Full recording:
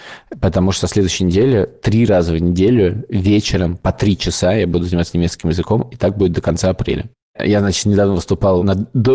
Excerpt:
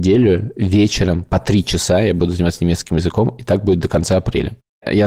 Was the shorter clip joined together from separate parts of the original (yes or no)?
no